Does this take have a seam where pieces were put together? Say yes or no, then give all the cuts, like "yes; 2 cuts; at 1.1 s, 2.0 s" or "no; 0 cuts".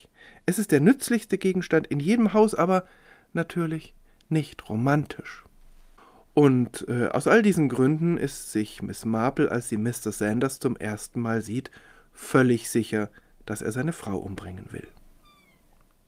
no; 0 cuts